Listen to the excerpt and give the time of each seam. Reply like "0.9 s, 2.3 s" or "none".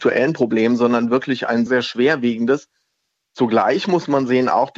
1.7 s